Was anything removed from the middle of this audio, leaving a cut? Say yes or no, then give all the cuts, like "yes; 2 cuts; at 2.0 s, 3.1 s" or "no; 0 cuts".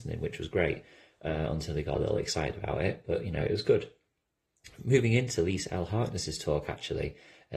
no; 0 cuts